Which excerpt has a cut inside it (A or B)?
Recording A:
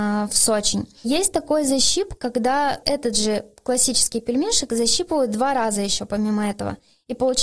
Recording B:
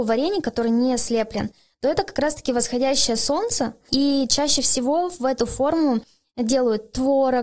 A